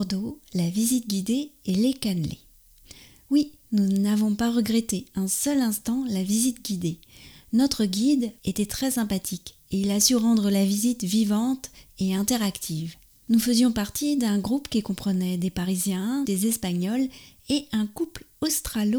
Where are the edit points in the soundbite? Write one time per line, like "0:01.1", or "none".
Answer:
0:08.4
0:16.2